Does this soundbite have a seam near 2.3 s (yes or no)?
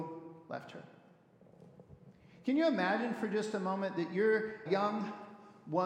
no